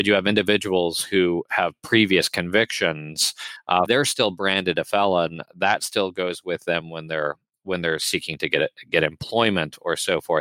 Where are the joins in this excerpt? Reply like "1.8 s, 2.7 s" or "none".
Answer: 3.9 s